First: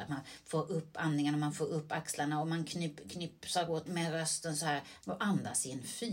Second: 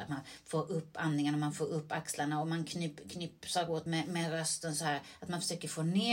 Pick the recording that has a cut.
first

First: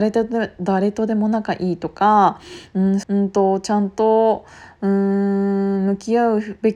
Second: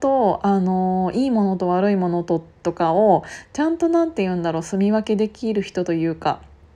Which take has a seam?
first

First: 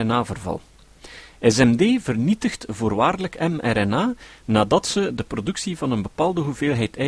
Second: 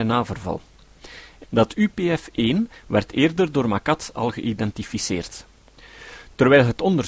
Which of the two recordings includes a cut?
second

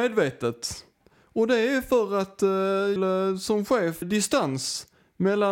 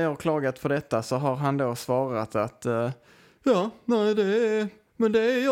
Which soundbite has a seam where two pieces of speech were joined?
first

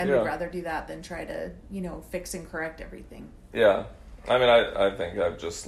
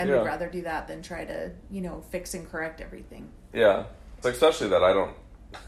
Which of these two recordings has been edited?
second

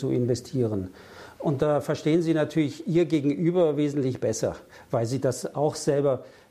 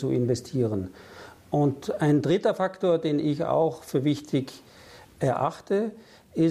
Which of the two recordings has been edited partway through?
first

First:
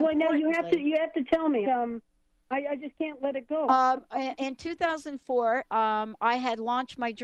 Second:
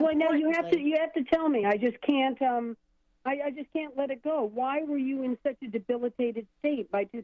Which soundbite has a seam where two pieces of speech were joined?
first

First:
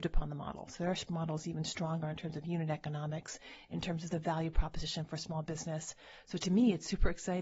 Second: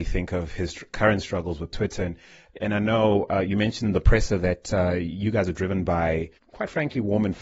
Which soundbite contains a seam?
second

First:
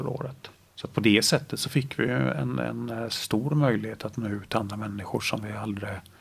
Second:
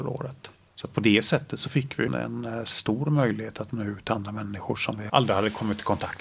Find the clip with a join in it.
second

